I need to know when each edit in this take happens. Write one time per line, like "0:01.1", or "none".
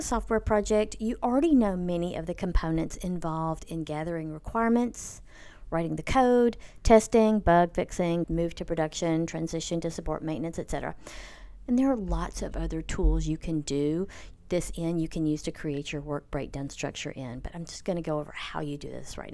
0:08.2
0:11.7